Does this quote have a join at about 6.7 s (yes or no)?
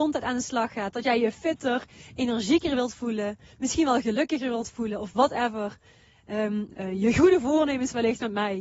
yes